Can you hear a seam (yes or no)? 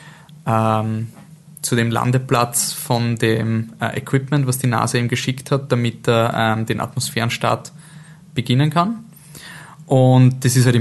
no